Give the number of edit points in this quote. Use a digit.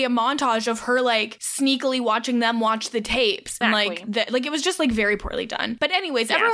1